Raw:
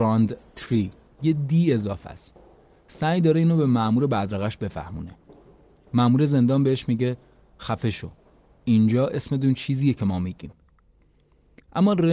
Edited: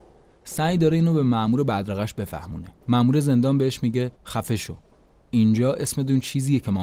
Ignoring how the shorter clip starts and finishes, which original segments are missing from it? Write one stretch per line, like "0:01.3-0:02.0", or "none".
0:05.2-0:05.9
0:07.2-0:07.5

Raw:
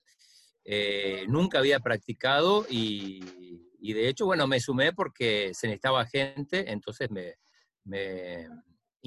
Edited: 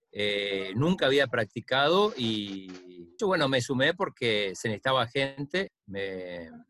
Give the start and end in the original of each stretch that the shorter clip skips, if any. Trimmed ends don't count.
0:03.7-0:04.2
0:06.7-0:07.7

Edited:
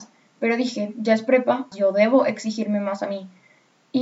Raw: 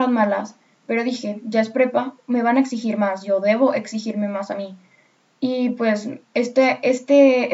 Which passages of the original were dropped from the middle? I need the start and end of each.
0:02.2-0:03.2

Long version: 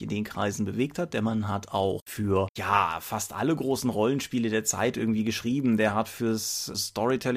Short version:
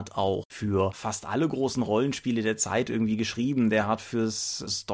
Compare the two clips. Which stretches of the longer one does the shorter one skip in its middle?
0:02.5-0:03.0

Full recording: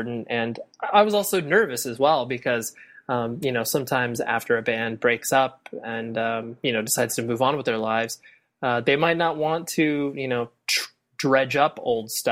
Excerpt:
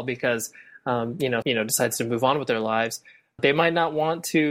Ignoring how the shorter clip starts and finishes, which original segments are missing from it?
0:03.6-0:06.6
0:08.6-0:08.8

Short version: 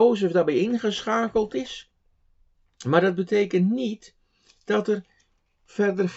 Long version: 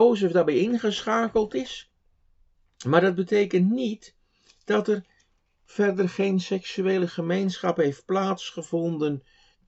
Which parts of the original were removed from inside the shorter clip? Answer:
none

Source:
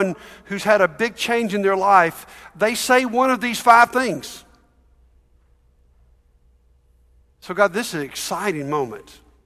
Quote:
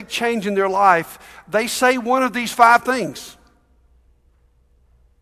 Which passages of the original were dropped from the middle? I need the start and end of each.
none

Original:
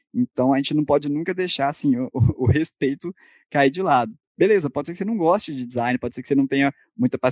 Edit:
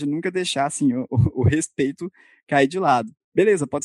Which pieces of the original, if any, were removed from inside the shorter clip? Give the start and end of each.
none

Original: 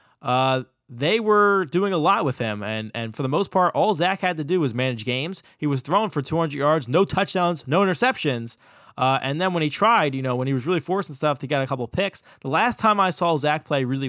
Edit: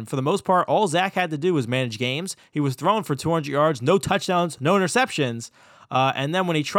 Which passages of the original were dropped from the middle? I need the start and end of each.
none

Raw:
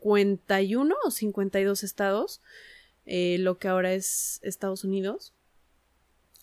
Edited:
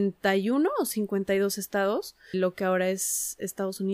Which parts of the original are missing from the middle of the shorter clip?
0:02.6-0:03.4

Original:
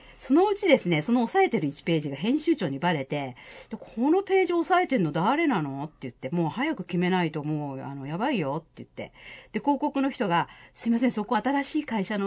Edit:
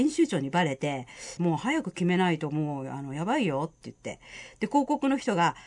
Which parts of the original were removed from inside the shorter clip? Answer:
0:03.7-0:06.3

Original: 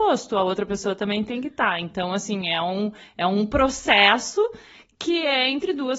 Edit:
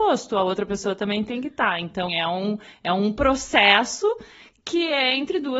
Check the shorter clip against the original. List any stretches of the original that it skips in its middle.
0:02.1-0:02.4

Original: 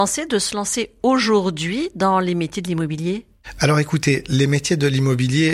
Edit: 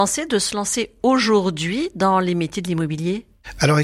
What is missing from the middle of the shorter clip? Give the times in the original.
none

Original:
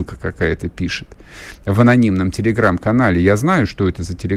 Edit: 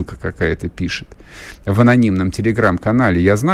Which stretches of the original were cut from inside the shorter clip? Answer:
none

